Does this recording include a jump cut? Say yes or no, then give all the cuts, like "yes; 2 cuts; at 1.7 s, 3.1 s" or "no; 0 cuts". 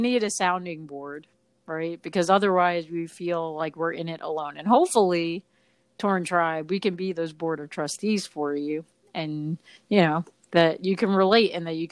no; 0 cuts